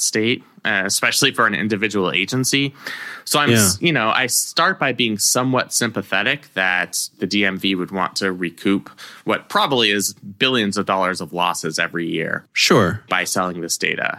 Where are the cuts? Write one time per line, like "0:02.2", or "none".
none